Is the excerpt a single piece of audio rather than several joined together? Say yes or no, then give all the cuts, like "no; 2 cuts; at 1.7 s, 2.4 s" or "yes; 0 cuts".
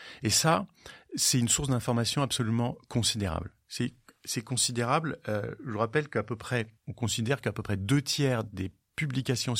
no; 1 cut; at 6.8 s